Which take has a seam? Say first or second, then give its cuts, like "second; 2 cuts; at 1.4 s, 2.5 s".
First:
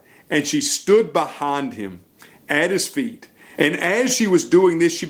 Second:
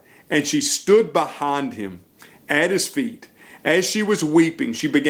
first; 1 cut; at 3.5 s